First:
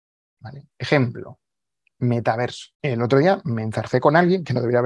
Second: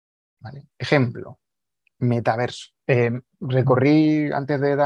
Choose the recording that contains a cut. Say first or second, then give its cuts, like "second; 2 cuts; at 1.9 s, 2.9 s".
second; 1 cut; at 2.7 s